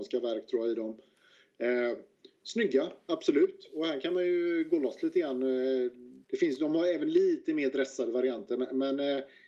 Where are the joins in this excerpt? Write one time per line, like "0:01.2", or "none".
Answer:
0:06.2